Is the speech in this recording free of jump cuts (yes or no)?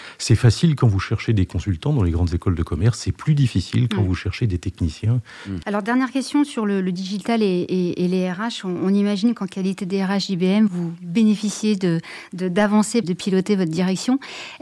no